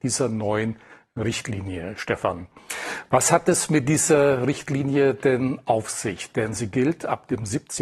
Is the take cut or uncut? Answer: uncut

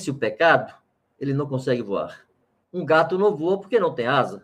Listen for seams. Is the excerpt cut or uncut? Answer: cut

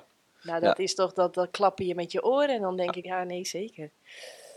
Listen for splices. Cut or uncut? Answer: cut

